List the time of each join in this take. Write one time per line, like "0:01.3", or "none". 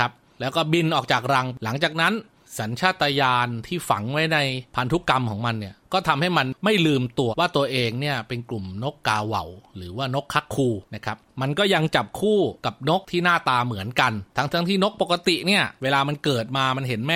0:07.3